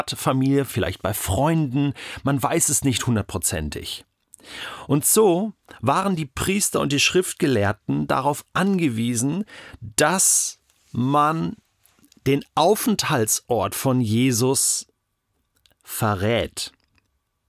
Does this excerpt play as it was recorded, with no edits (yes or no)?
yes